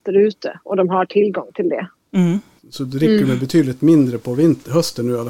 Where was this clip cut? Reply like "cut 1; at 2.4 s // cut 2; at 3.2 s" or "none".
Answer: cut 1; at 2.6 s